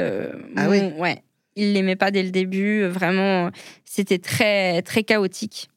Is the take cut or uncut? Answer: uncut